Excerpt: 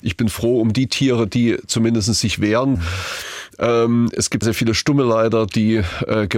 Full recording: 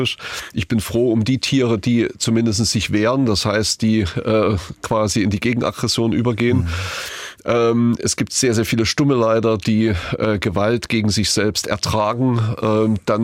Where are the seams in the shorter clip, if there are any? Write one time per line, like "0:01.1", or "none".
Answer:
0:02.7
0:04.4